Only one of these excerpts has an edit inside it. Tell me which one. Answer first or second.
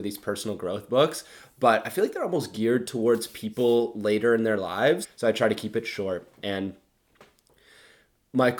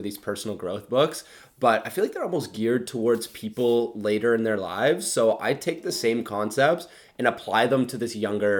first